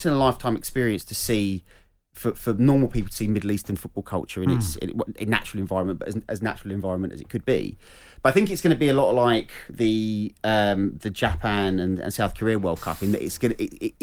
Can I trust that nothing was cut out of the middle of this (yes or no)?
yes